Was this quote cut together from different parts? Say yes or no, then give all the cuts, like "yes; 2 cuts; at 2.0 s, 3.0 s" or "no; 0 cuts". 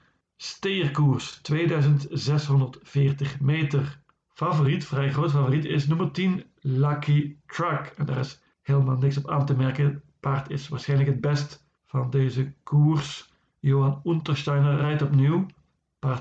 no; 0 cuts